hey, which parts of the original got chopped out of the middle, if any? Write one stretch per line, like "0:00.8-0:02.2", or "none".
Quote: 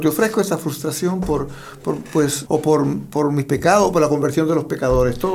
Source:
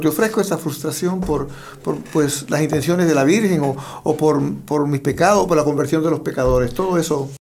0:02.5-0:04.0